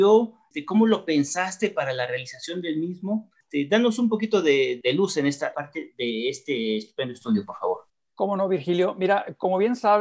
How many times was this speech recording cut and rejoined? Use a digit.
0